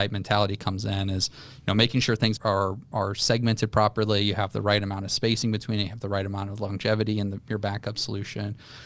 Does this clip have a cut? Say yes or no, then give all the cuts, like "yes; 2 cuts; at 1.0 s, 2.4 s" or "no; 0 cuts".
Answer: yes; 1 cut; at 2.4 s